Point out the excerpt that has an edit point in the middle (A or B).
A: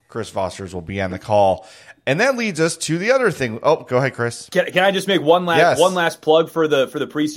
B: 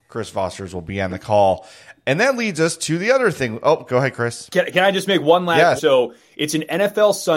B